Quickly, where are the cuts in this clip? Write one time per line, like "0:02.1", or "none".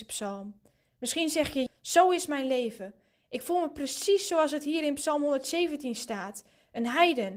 0:01.7